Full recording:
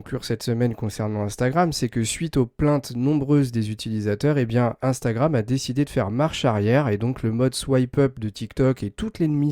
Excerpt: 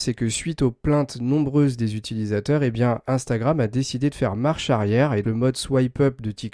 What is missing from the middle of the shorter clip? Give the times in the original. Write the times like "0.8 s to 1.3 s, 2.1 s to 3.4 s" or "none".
7.0 s to 7.2 s